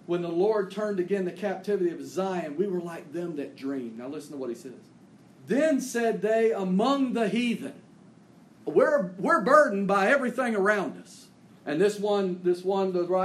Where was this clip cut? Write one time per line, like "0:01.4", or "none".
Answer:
0:05.4
0:08.6
0:11.4